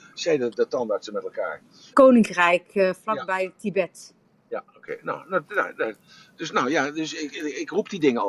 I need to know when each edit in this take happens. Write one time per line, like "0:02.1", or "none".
0:01.9